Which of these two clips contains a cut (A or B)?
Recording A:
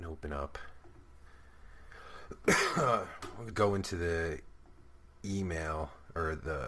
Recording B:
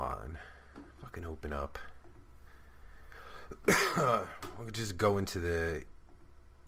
A